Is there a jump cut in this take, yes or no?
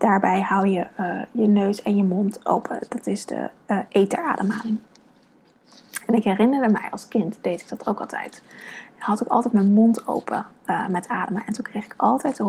no